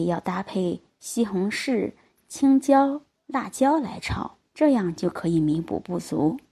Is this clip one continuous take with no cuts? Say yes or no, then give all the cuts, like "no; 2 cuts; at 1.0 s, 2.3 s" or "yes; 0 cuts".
no; 1 cut; at 4.4 s